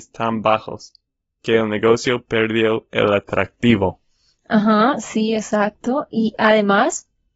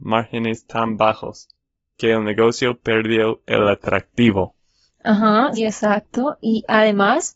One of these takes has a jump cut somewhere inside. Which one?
second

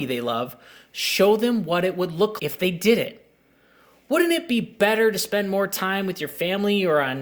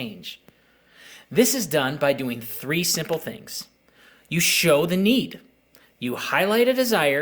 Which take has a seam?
first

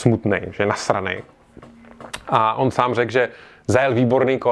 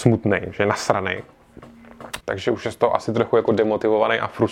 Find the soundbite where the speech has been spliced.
second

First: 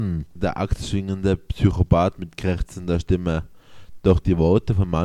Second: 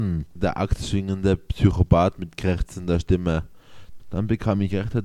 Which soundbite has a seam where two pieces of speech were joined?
second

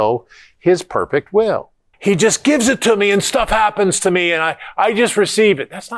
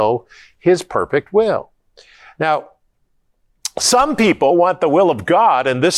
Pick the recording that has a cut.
first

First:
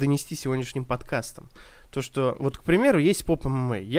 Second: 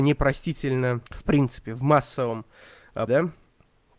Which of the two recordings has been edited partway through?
second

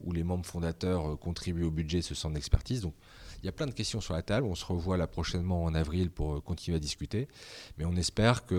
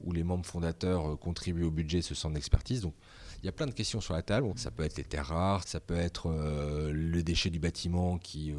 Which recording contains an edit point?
second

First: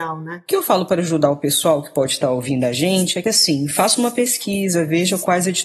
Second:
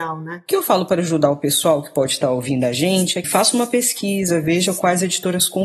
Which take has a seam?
second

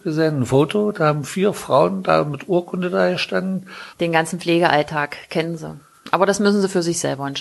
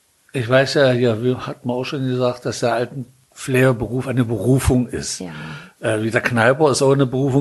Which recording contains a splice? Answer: first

